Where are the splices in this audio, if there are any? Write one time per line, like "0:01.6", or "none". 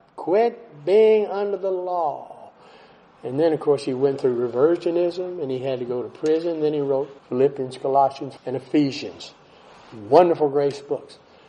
0:07.2
0:08.4